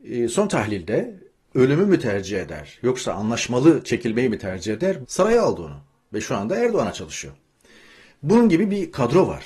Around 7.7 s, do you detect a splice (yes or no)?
no